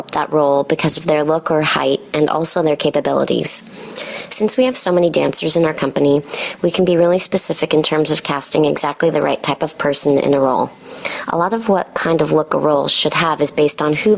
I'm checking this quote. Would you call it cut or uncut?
uncut